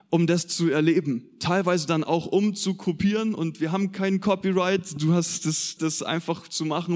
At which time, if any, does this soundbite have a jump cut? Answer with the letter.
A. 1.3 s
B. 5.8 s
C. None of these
B